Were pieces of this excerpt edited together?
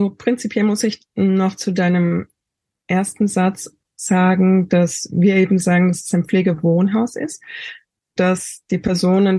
yes; 1 cut; at 8.2 s

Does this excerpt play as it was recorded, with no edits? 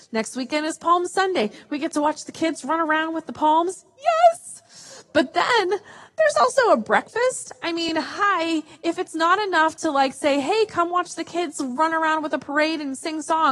yes; 0 cuts

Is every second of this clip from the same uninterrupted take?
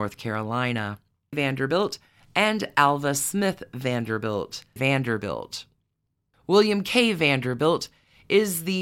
no; 2 cuts; at 1.3 s, 4.8 s

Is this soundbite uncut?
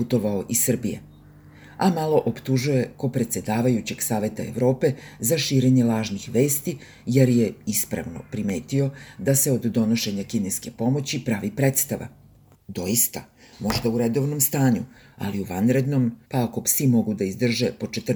no; 2 cuts; at 12.5 s, 16.2 s

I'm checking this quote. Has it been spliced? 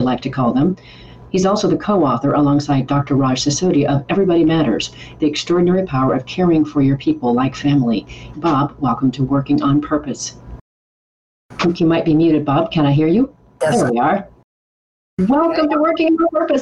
yes; 1 cut; at 8.3 s

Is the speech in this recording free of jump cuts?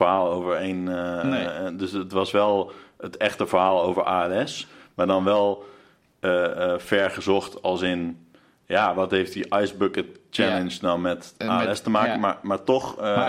yes; 0 cuts

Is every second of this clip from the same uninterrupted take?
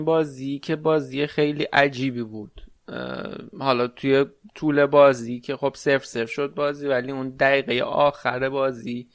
yes; 0 cuts

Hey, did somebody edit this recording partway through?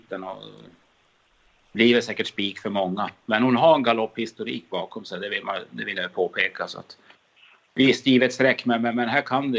no; 0 cuts

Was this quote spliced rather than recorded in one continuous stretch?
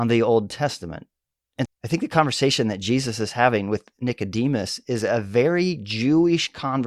yes; 1 cut; at 1.7 s

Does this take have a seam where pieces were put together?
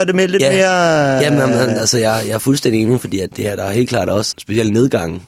yes; 2 cuts; at 3.3 s, 4.3 s

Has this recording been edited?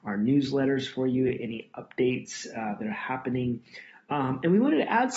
no; 0 cuts

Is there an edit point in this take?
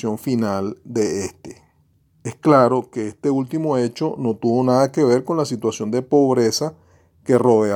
yes; 1 cut; at 2.0 s

